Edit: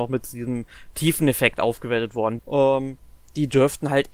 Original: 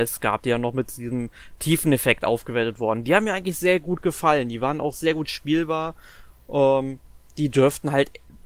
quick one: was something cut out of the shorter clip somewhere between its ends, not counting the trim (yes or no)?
yes